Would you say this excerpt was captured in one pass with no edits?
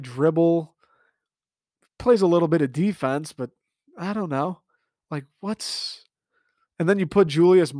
yes; 0 cuts

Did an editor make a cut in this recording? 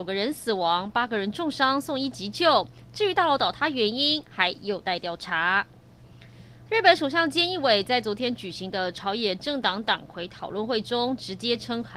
no; 0 cuts

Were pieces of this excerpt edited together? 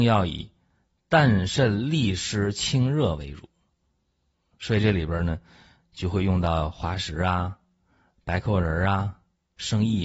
no; 0 cuts

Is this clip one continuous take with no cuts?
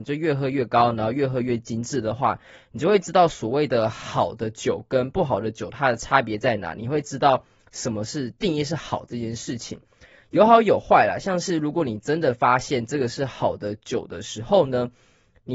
yes; 0 cuts

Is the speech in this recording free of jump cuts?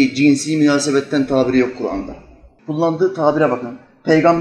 no; 1 cut; at 2.6 s

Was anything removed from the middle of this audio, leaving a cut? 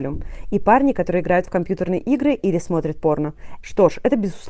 yes; 1 cut; at 3.6 s

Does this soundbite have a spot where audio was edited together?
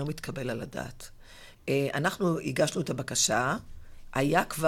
yes; 1 cut; at 1.5 s

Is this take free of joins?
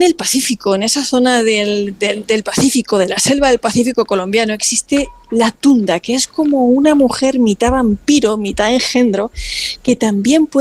yes; 0 cuts

